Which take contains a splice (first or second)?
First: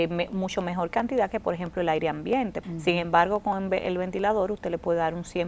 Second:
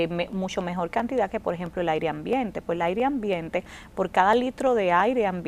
first